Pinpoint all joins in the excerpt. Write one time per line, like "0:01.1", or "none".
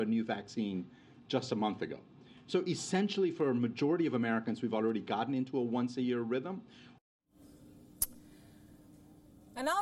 none